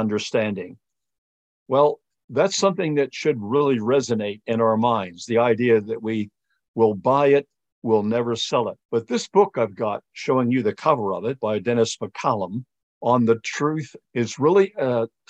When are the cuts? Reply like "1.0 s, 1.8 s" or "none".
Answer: 8.8 s, 14.0 s